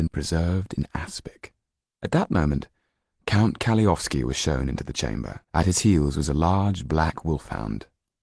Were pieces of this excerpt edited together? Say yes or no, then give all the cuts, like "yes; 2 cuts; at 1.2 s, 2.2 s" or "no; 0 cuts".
yes; 2 cuts; at 1.9 s, 5.4 s